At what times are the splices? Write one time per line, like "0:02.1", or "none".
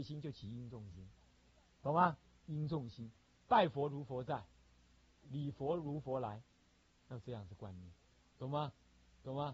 0:05.2